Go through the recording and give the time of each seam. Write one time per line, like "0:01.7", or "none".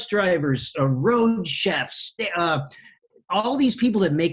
none